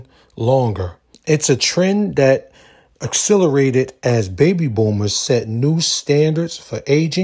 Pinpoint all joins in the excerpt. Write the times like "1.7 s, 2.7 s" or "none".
1.1 s